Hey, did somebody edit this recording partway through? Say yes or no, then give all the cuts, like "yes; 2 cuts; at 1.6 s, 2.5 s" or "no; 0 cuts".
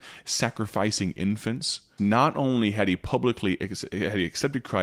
yes; 1 cut; at 2.0 s